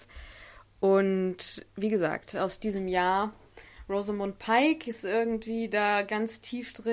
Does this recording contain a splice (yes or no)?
no